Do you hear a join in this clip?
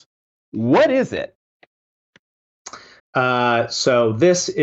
yes; 1 cut; at 3.0 s

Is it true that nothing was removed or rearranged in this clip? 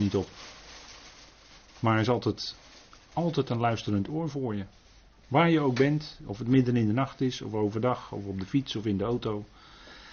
yes; 0 cuts

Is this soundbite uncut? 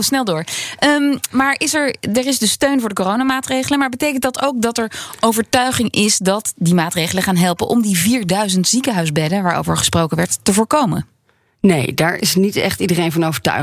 yes; 0 cuts

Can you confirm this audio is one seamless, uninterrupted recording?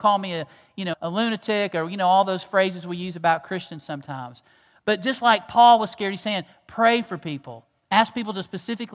no; 1 cut; at 0.9 s

